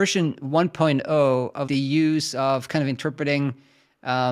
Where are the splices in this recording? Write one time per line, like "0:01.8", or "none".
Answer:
0:01.7